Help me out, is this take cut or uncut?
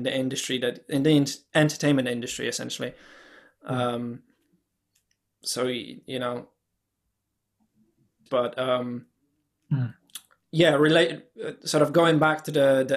cut